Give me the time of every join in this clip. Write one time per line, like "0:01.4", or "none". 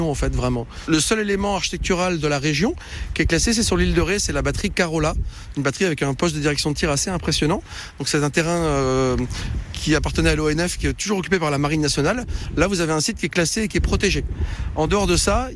none